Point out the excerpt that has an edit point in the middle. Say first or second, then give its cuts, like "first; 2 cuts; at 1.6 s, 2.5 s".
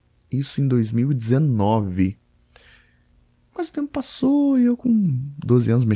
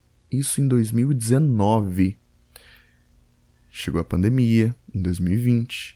first; 1 cut; at 3.5 s